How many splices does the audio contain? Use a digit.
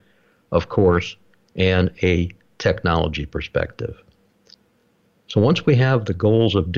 0